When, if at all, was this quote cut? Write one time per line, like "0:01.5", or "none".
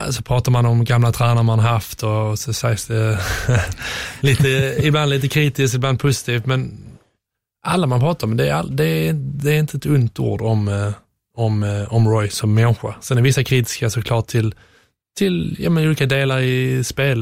none